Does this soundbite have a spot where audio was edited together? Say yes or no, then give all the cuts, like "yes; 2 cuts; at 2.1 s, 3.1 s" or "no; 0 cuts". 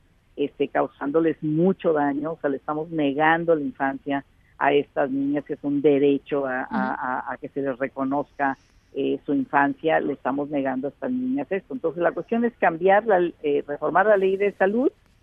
no; 0 cuts